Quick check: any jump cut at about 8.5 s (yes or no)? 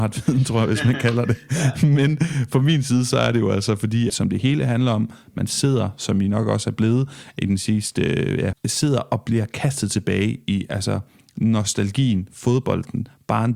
yes